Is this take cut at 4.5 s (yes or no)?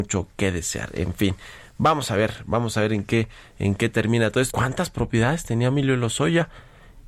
yes